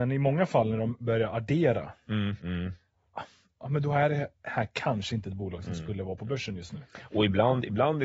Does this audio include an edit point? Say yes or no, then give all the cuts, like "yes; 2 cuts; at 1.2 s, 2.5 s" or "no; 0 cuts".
yes; 1 cut; at 2.4 s